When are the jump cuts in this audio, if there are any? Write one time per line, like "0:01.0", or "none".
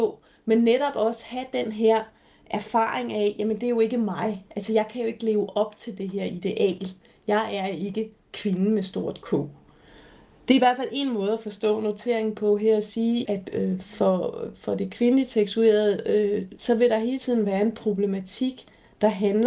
0:13.3
0:16.6